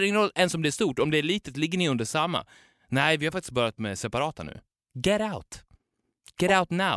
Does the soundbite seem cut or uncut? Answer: uncut